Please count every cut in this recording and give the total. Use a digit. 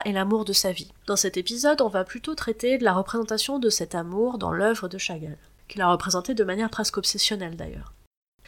2